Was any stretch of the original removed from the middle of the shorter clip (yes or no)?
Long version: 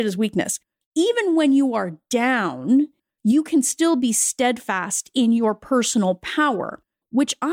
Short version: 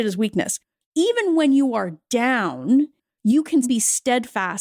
yes